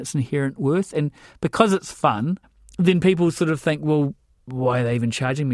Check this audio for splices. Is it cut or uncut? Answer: uncut